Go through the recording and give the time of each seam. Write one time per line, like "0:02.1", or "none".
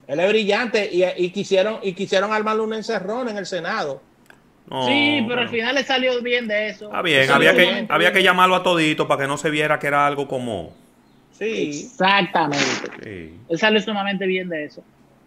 none